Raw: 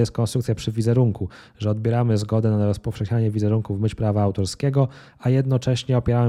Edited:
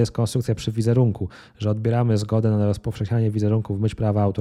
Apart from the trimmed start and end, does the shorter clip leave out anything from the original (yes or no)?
no